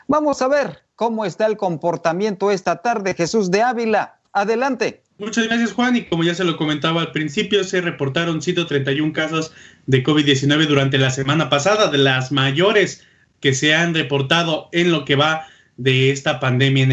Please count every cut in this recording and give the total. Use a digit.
1